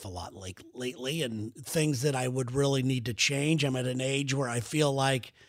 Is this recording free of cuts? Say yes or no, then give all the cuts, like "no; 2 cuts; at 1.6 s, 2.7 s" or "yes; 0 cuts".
yes; 0 cuts